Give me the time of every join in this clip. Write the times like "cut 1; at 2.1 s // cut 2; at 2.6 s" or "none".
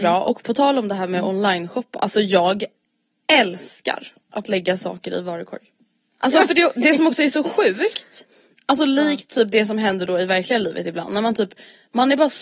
cut 1; at 6.1 s